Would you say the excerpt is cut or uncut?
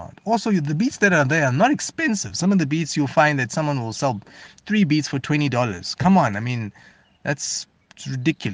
uncut